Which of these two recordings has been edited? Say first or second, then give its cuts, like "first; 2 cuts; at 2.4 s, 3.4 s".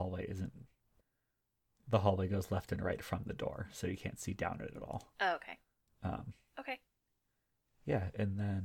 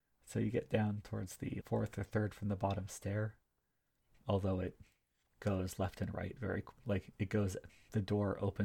second; 2 cuts; at 1.6 s, 4.1 s